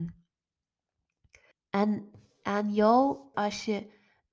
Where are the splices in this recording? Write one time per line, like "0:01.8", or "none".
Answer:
0:01.5
0:03.3